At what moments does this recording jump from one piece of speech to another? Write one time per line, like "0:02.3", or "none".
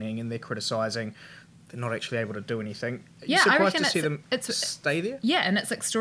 none